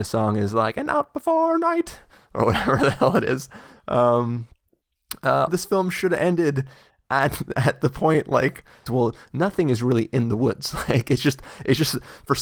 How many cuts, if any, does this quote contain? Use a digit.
2